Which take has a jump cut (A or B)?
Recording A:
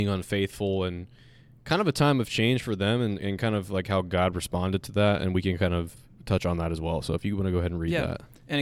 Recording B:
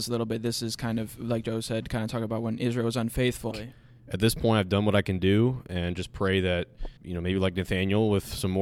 B